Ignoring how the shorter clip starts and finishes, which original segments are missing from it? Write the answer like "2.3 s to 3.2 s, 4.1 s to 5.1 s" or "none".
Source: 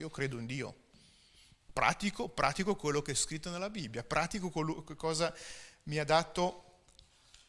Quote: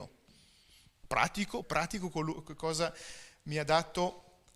2.3 s to 4.0 s